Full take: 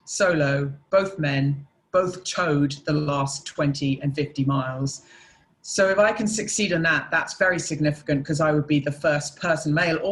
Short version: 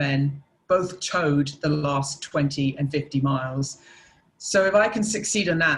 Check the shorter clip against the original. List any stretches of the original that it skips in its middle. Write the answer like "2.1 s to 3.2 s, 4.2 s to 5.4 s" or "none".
none

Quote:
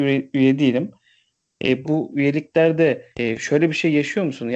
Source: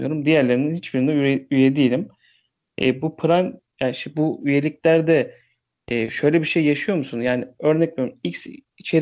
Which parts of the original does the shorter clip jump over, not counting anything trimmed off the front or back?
3.0 s to 4.1 s, 5.4 s to 5.8 s

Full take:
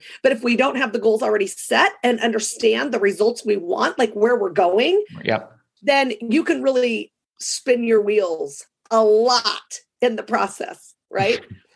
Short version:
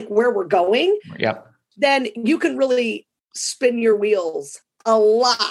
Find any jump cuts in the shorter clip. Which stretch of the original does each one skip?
none

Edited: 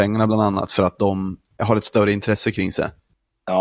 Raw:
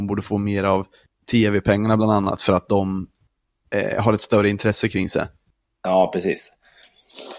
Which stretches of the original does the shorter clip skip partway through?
3.3 s to 4.0 s

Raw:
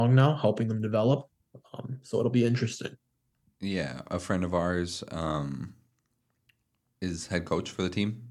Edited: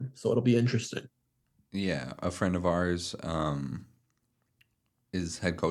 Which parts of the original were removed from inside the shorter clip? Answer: none

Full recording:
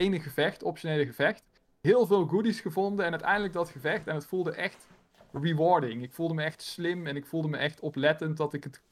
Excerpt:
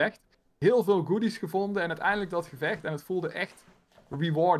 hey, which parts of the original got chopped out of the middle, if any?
none

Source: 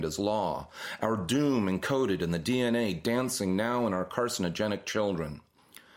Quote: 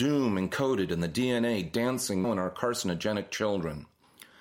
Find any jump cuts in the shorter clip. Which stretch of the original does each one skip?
3.5 s to 3.8 s

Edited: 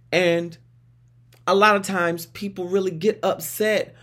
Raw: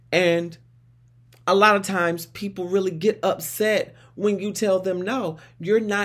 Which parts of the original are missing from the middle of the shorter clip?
none

